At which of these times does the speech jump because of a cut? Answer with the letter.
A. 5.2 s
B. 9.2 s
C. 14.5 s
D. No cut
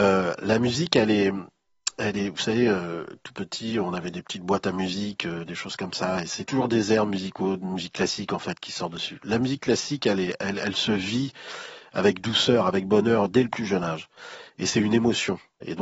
D